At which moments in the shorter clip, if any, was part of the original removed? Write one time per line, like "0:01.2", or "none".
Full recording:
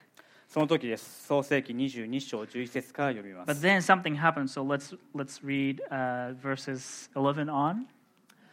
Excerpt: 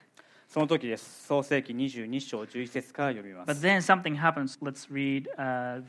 0:04.5